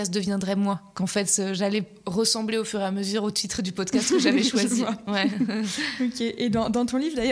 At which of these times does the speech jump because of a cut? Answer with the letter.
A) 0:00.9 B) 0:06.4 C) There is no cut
C